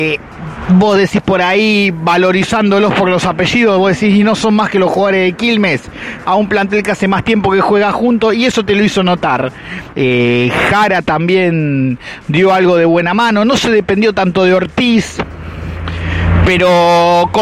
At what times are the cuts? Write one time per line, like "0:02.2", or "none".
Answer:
0:06.2
0:09.9